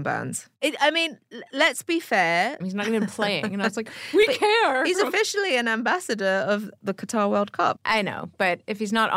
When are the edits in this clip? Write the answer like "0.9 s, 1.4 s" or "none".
2.6 s, 7.8 s

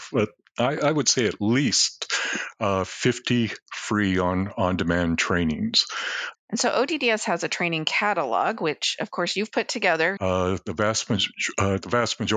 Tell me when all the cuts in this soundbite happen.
6.3 s, 10.2 s

